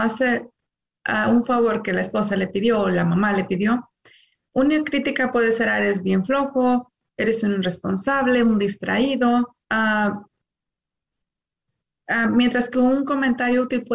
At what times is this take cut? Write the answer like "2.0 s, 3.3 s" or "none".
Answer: 9.6 s